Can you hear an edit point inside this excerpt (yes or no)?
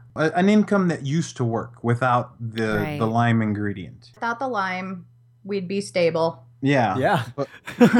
yes